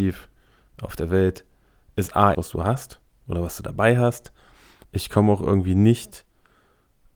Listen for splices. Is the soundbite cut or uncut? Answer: cut